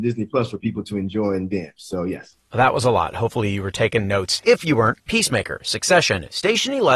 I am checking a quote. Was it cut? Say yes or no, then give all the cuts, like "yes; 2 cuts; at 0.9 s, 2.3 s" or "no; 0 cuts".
yes; 1 cut; at 5.0 s